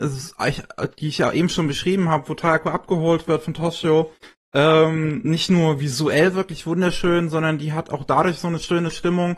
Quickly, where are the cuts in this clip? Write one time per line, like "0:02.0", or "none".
none